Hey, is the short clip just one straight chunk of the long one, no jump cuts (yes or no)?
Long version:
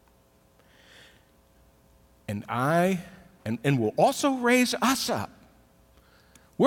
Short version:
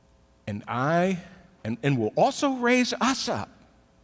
yes